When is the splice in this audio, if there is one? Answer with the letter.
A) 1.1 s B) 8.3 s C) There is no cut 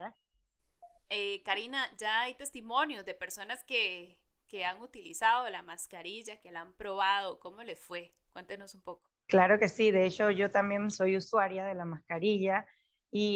A